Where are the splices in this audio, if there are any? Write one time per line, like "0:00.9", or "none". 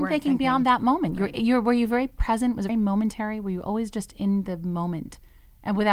0:02.7

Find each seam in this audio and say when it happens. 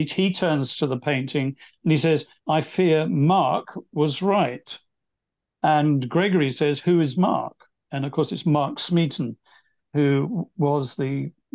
none

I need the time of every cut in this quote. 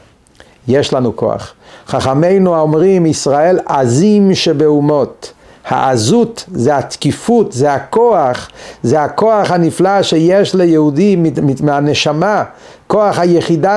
none

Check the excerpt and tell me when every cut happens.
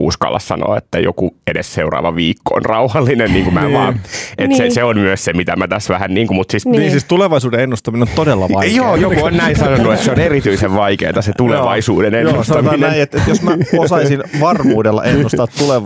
0:09.0

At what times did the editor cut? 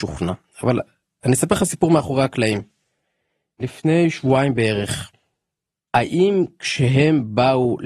0:05.8

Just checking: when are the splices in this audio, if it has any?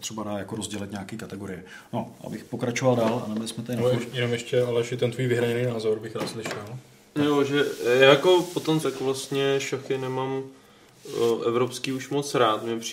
0:08.8

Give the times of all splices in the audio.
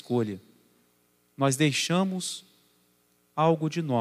none

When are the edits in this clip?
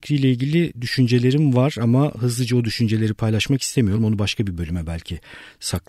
none

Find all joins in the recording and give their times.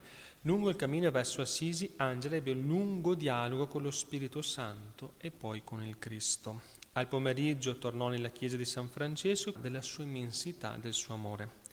0:09.6

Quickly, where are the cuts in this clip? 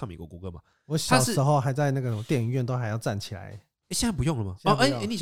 none

